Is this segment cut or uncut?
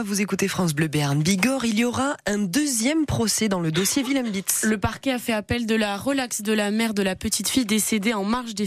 uncut